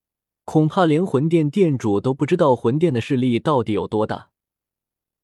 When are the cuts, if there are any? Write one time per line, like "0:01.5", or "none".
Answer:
none